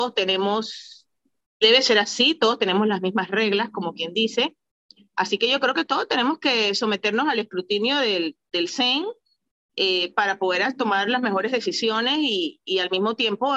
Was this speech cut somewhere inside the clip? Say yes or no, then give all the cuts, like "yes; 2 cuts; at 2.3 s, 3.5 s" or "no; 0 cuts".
yes; 1 cut; at 1.6 s